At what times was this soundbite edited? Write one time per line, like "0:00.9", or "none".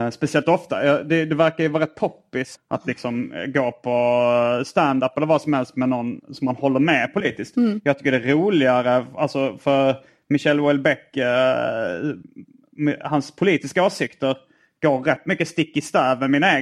0:02.5